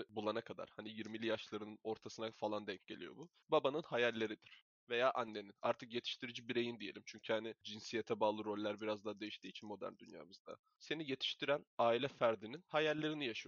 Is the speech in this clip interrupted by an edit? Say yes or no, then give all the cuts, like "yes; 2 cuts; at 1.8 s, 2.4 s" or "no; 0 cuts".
no; 0 cuts